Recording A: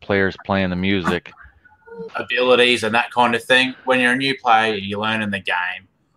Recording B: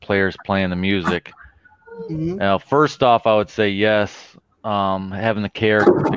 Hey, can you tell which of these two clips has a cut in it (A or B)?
A